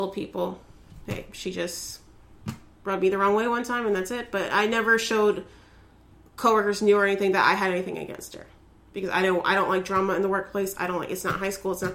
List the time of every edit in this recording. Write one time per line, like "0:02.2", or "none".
none